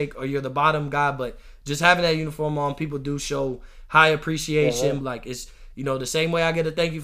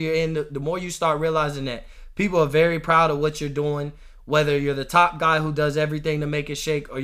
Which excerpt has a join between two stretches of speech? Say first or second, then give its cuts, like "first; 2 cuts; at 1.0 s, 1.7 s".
first; 1 cut; at 5.0 s